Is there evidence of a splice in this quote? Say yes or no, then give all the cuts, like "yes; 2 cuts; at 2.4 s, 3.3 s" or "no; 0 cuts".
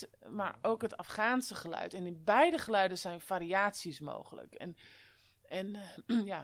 no; 0 cuts